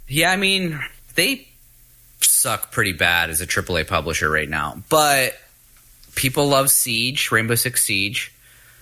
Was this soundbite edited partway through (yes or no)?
no